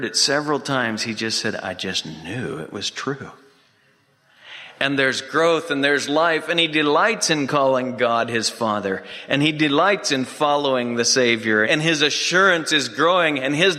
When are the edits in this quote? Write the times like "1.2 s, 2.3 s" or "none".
11.6 s